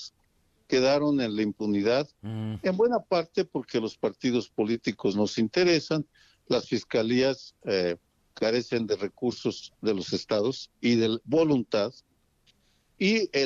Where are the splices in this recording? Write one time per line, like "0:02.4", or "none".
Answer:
none